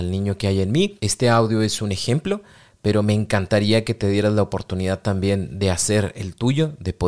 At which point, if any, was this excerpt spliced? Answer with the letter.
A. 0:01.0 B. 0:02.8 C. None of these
C